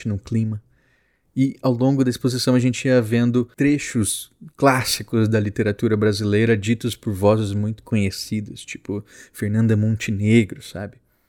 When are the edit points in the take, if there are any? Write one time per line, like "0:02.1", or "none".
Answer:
none

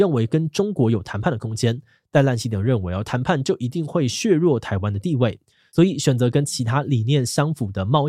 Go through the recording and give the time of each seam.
none

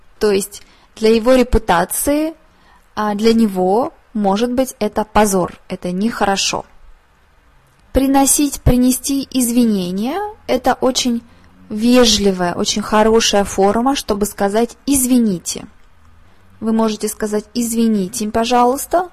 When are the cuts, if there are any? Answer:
none

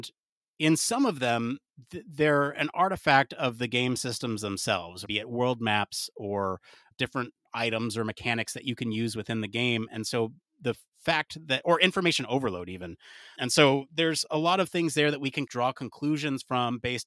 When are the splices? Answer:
none

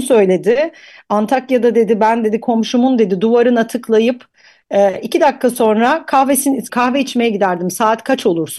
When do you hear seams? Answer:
0:06.7

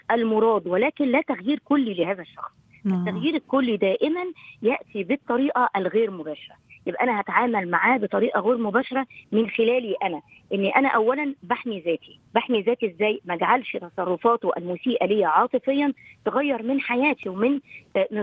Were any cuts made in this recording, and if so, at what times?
0:12.3

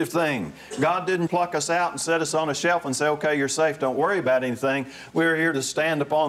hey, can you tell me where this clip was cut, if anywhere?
0:01.3
0:05.1

